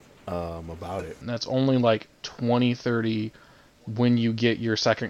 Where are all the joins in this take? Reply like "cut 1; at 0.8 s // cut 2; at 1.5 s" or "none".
cut 1; at 1.2 s